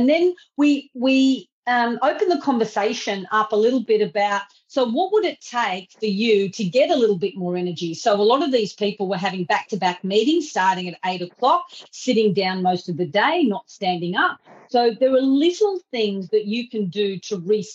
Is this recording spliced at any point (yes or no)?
no